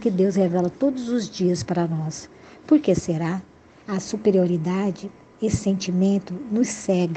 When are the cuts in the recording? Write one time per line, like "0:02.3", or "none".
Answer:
0:03.8